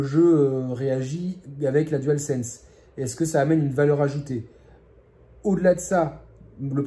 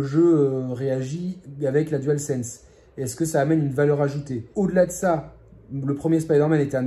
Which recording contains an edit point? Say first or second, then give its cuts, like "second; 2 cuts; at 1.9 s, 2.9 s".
second; 1 cut; at 4.5 s